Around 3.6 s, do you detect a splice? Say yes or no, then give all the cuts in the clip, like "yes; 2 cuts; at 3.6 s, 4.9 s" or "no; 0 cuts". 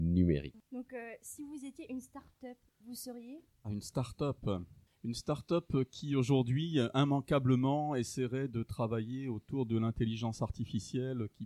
yes; 1 cut; at 3.6 s